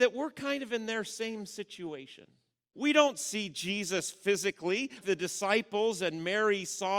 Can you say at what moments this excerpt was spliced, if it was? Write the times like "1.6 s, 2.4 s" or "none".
2.7 s, 5.0 s